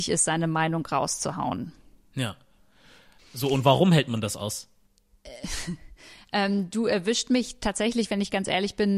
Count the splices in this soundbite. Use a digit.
1